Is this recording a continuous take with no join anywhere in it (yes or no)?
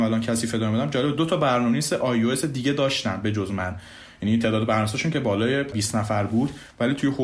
yes